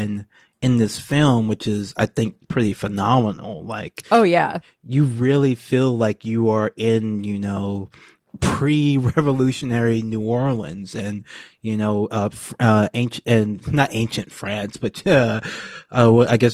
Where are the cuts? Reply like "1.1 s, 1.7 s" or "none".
none